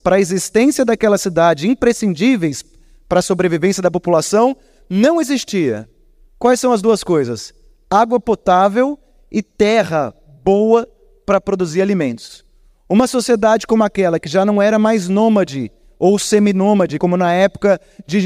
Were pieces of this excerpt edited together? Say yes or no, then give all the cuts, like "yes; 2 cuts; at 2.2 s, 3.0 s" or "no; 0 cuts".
no; 0 cuts